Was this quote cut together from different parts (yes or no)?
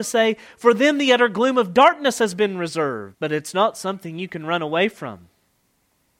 yes